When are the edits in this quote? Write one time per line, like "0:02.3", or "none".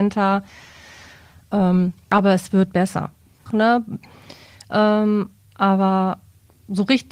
0:03.5

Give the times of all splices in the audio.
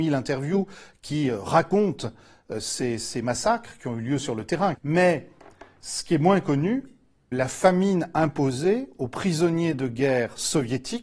0:04.7
0:07.3

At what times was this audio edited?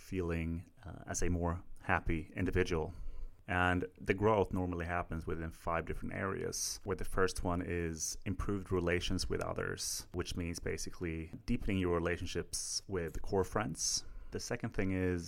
none

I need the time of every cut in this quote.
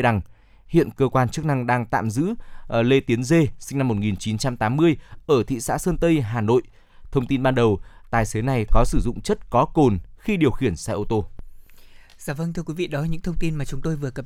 none

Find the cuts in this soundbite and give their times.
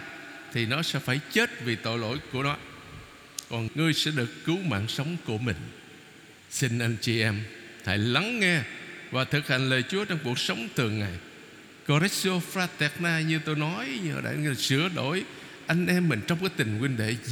0:03.7
0:06.4

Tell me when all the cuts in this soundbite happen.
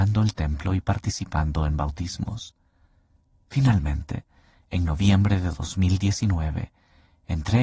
none

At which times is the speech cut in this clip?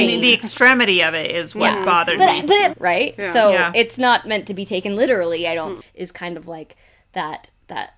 0:02.7
0:05.8

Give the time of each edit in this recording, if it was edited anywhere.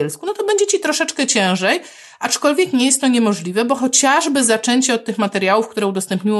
none

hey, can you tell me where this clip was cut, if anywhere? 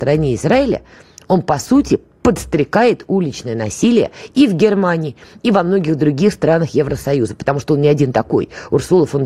none

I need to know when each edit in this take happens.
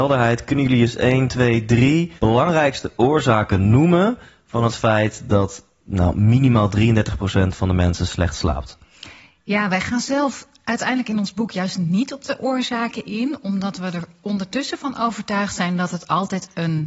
0:02.2

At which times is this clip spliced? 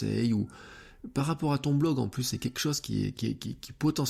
0:03.1

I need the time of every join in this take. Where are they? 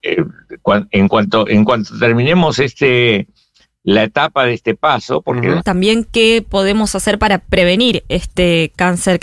0:05.6

